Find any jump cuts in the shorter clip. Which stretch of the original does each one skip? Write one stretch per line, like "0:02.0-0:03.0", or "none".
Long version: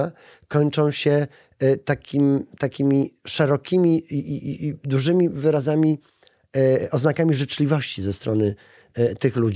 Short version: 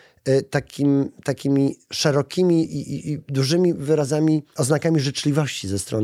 0:04.0-0:04.2
0:06.1-0:06.9